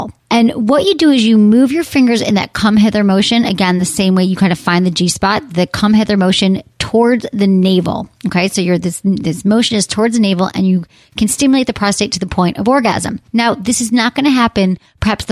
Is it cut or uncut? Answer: uncut